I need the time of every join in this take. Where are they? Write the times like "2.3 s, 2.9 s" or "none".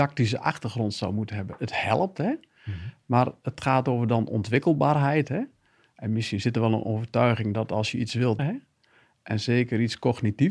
8.4 s